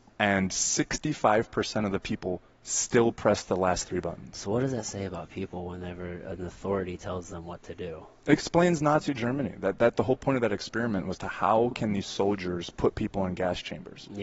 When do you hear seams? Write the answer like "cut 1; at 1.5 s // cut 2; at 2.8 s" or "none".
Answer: none

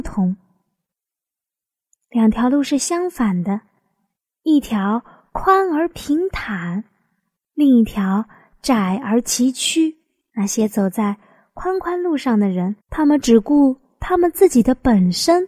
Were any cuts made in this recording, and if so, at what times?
cut 1; at 10.3 s // cut 2; at 12.8 s

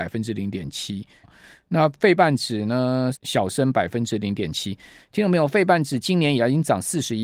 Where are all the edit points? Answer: cut 1; at 1.2 s // cut 2; at 3.1 s

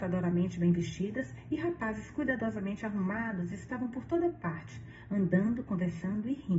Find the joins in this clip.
none

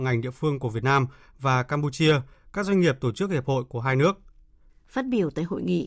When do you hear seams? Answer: cut 1; at 4.7 s

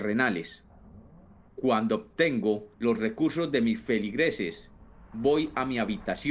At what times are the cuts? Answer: cut 1; at 1.5 s // cut 2; at 2.7 s

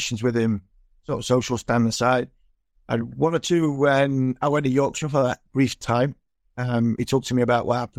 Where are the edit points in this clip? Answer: cut 1; at 7.0 s

